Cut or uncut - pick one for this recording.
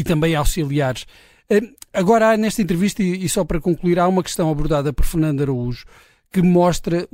uncut